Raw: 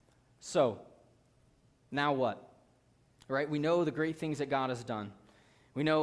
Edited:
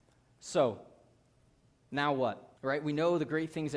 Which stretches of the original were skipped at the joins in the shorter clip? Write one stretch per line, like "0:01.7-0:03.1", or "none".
0:02.6-0:03.2